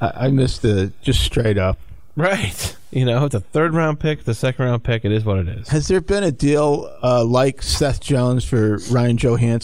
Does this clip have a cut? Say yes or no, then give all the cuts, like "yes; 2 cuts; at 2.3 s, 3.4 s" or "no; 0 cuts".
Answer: no; 0 cuts